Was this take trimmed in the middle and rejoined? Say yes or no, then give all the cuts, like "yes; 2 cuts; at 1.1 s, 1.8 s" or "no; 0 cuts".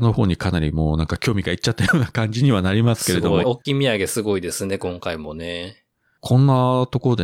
yes; 1 cut; at 3.4 s